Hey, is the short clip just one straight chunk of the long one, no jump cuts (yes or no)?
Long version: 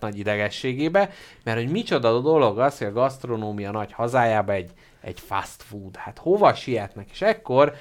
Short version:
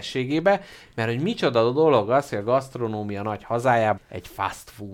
no